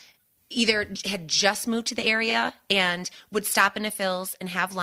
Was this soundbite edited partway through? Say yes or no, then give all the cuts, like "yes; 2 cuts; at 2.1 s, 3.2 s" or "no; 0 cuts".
no; 0 cuts